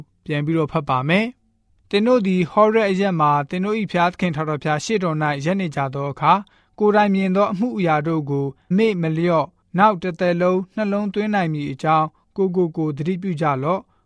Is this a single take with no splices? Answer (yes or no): no